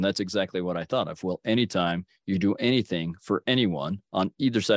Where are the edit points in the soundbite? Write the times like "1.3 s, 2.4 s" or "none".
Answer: none